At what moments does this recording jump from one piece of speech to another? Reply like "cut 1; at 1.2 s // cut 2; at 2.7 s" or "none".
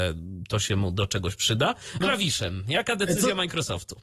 cut 1; at 2.0 s

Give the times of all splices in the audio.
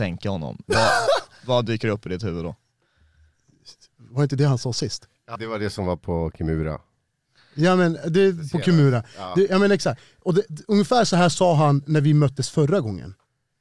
cut 1; at 5.3 s

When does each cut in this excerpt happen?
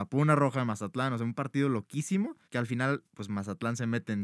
cut 1; at 2.4 s

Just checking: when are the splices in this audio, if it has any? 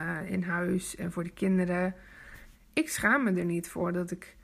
cut 1; at 2.5 s

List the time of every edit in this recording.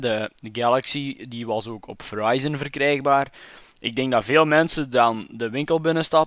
none

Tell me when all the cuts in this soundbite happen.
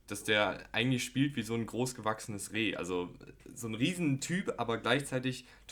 none

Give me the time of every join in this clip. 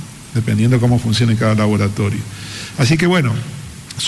none

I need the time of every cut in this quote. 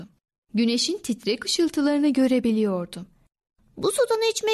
none

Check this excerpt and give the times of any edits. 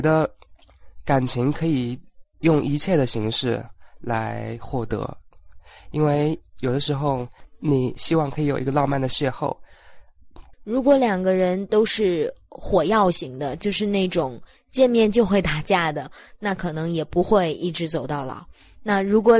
cut 1; at 10.5 s

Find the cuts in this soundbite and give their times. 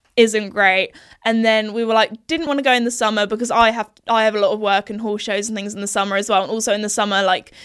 cut 1; at 2.5 s

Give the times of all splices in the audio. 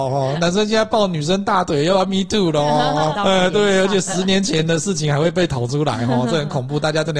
cut 1; at 3.2 s

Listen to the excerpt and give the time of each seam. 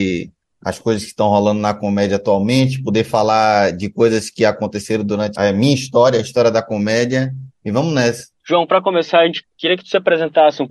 cut 1; at 5.4 s // cut 2; at 9.4 s

